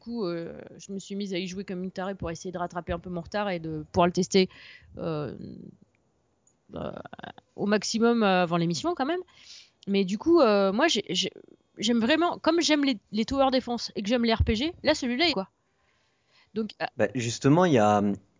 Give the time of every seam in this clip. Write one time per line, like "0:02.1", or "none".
0:15.3